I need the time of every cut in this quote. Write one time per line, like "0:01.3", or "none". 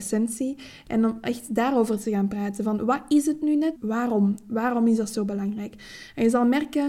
0:03.8